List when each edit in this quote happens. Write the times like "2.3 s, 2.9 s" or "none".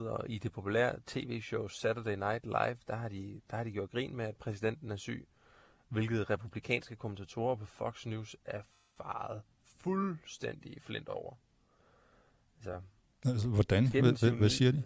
none